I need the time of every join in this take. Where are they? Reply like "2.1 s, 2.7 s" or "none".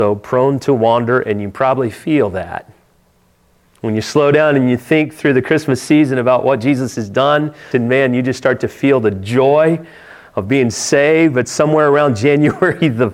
3.7 s, 7.7 s

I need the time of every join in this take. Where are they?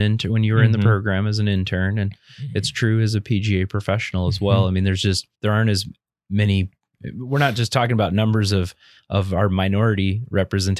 5.3 s

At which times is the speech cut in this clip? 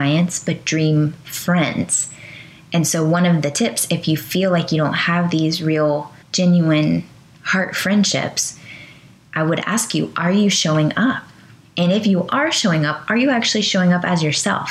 6.2 s

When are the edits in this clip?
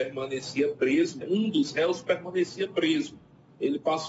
1.2 s

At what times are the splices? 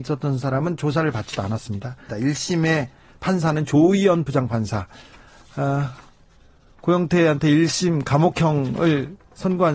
2.1 s

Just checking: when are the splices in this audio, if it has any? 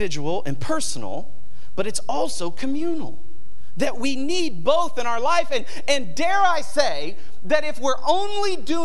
none

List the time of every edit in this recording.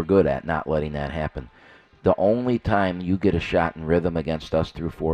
none

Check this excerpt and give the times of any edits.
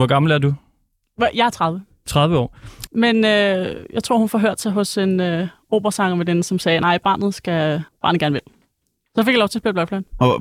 2.9 s, 7.9 s

